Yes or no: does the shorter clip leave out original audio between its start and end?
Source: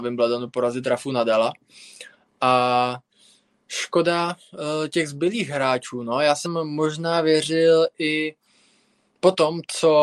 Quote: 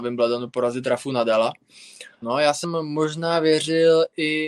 yes